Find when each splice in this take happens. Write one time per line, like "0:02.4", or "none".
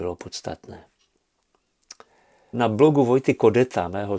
0:02.5